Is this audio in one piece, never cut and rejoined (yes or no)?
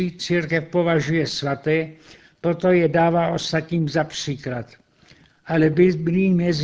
yes